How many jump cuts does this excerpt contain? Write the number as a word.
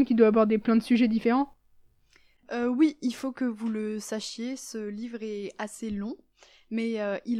zero